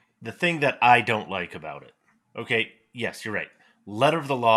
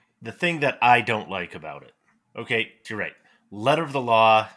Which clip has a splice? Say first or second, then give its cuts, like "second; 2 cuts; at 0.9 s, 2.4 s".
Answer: second; 1 cut; at 2.8 s